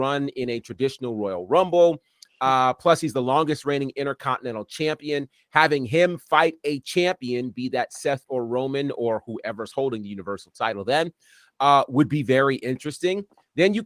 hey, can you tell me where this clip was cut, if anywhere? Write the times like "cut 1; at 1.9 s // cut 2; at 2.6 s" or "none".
none